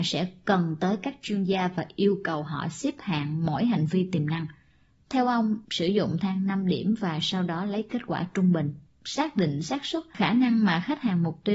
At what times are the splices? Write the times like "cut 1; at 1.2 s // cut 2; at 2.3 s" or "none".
cut 1; at 5.6 s